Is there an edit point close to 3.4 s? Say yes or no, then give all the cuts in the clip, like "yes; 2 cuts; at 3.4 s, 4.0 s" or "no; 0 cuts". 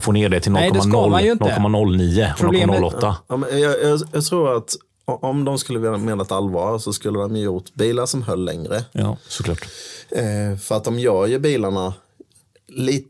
no; 0 cuts